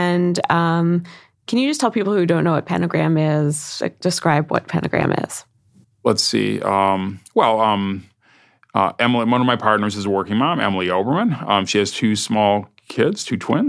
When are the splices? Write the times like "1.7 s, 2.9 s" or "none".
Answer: 5.8 s

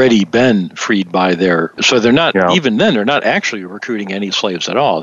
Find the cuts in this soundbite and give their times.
1.8 s

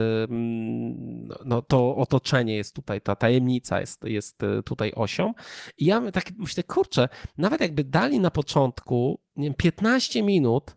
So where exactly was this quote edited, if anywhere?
none

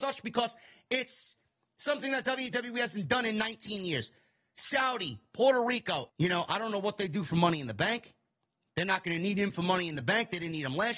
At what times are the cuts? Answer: 6.1 s

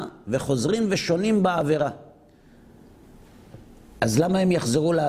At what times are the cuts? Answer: none

